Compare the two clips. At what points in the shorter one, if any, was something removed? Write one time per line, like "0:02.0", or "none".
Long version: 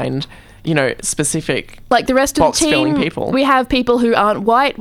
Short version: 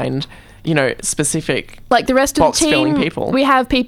none